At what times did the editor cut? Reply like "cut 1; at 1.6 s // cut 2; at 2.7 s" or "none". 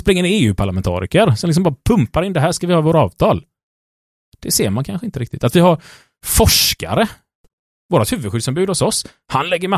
none